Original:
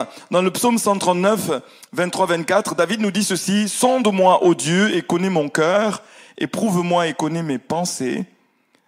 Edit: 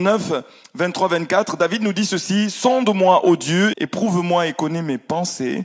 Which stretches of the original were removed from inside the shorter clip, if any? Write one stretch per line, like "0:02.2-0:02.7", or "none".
0:04.9-0:06.3